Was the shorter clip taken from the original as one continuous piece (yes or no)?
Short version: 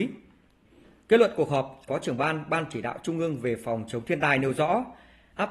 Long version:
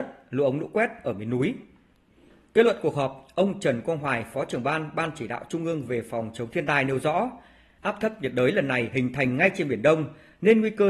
no